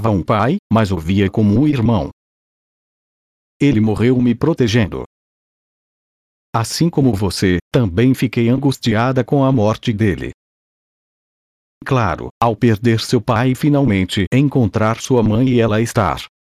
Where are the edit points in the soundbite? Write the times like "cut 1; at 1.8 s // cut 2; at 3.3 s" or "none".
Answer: cut 1; at 12.3 s